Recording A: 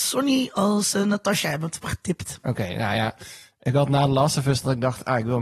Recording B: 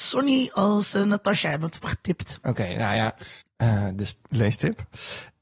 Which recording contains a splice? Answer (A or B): B